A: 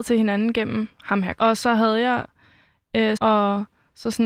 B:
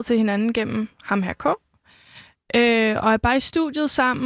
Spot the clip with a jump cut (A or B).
A